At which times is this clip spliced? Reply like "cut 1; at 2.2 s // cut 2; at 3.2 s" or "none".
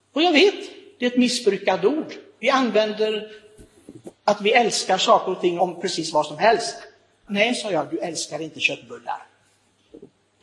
cut 1; at 5.6 s // cut 2; at 7.3 s